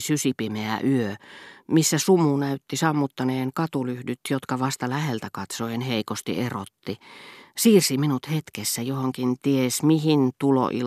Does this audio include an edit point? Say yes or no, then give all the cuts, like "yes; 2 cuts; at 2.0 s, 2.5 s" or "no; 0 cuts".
no; 0 cuts